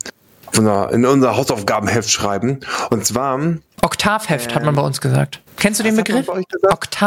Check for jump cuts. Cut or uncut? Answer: cut